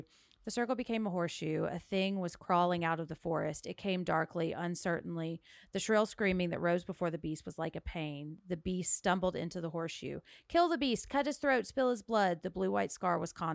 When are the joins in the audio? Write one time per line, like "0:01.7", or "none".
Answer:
none